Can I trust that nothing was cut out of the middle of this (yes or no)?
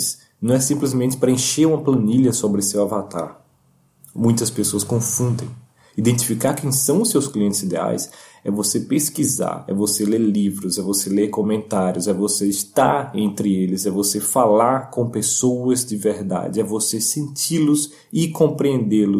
yes